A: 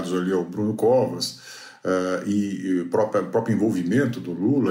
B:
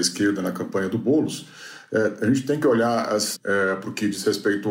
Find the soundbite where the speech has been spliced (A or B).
B